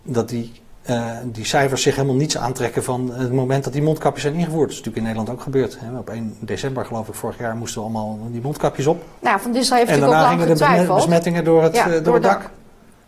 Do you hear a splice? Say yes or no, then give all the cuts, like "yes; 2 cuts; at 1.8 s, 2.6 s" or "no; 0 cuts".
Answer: yes; 1 cut; at 9.2 s